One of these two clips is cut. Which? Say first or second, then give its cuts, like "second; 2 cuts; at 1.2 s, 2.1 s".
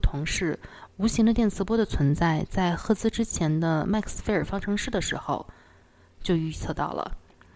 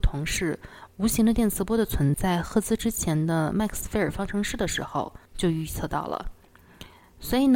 second; 2 cuts; at 2.1 s, 5.3 s